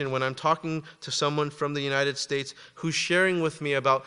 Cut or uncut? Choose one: uncut